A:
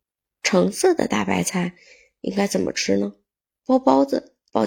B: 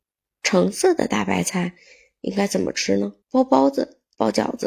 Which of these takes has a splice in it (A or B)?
B